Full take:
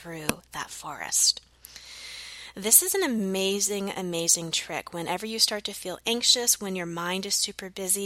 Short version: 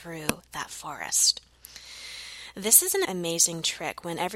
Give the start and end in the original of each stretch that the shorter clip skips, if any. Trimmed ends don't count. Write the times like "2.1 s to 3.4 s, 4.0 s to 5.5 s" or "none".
3.0 s to 3.9 s